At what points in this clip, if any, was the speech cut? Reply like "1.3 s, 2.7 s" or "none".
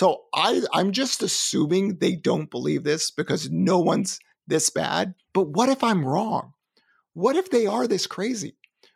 5.2 s